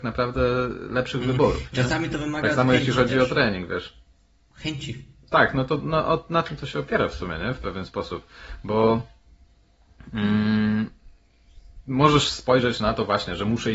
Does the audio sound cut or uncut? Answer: uncut